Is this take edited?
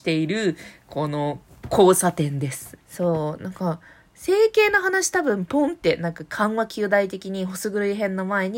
yes; 1 cut; at 2.8 s

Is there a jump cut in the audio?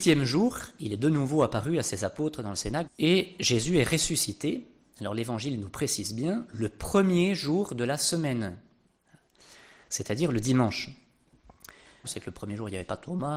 yes; 2 cuts; at 2.9 s, 12.0 s

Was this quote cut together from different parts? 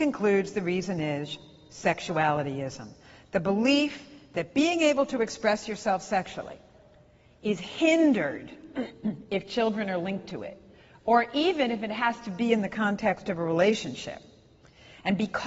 no; 0 cuts

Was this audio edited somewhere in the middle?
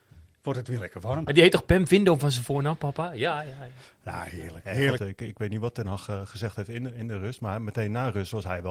yes; 2 cuts; at 1.3 s, 5.0 s

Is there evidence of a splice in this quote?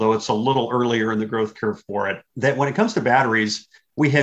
yes; 1 cut; at 2.3 s

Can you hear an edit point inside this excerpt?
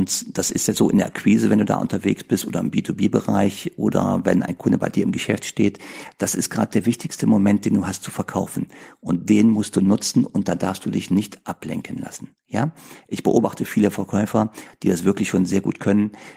no; 0 cuts

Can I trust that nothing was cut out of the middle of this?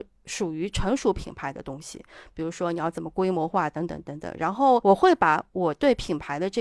yes; 0 cuts

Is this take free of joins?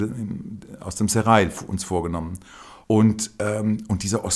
no; 1 cut; at 2.8 s

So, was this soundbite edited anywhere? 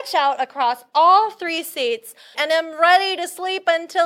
yes; 1 cut; at 2.3 s

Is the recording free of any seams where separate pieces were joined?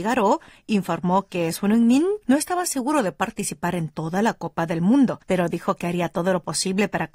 no; 2 cuts; at 2.2 s, 5.2 s

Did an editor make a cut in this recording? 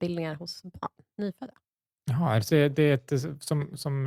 yes; 1 cut; at 2.5 s

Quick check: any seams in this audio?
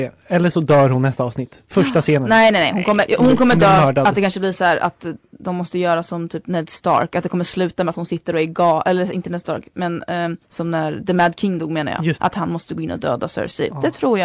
yes; 2 cuts; at 10.4 s, 12.2 s

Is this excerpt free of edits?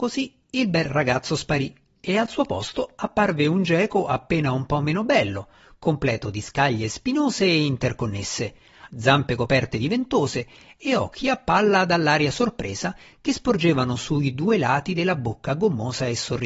no; 1 cut; at 8.9 s

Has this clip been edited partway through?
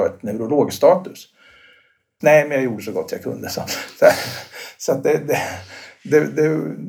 yes; 1 cut; at 2.2 s

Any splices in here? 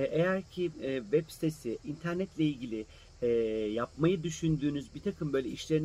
yes; 1 cut; at 1.8 s

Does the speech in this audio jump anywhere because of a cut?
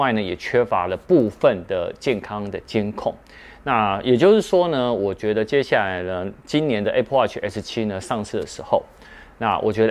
no; 0 cuts

